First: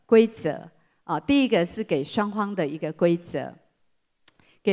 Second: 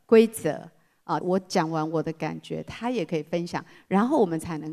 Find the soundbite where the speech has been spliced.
second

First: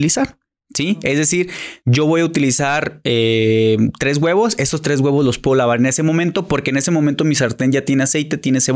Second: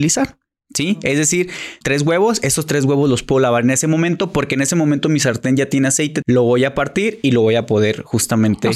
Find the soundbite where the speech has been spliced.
second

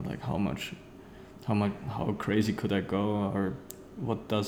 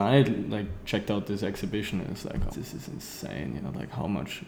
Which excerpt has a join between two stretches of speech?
second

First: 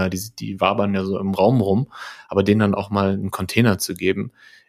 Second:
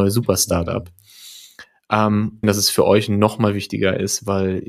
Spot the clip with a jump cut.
second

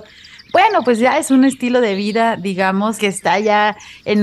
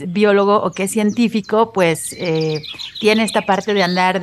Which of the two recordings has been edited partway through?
first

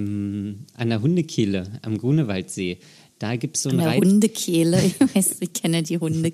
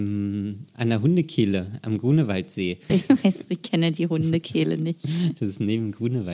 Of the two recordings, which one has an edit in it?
second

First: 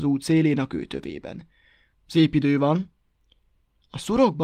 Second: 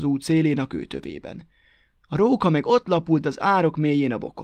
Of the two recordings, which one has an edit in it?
first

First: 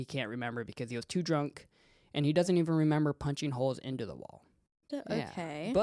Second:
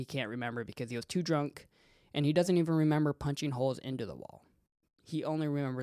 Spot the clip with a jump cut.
first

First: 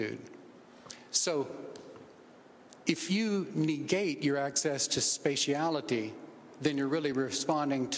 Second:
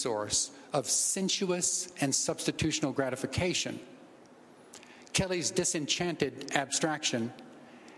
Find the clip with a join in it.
first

